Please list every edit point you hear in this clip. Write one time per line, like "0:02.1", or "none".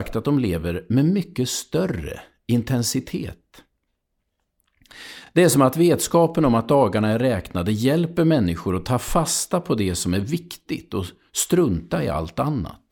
none